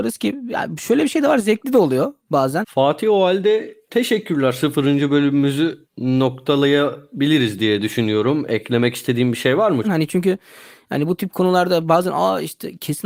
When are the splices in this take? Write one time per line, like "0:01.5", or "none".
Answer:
0:02.6
0:09.8